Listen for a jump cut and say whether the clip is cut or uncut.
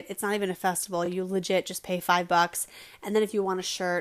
uncut